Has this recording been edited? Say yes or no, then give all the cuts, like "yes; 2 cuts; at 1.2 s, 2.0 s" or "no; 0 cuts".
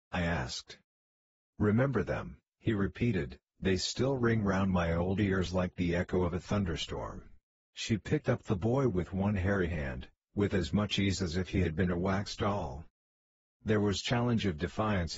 yes; 2 cuts; at 7.6 s, 13.4 s